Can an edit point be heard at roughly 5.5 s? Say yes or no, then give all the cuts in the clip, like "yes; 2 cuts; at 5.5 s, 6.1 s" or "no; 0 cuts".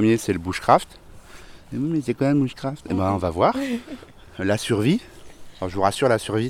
no; 0 cuts